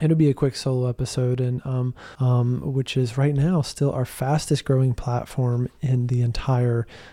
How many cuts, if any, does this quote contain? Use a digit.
1